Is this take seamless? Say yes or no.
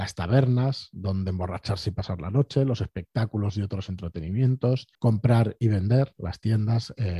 no